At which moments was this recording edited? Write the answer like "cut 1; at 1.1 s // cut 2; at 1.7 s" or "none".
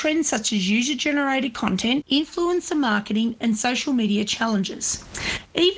cut 1; at 2.0 s